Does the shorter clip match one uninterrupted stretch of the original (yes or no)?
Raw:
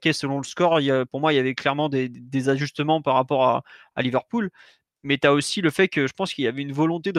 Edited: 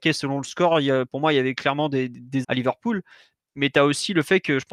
no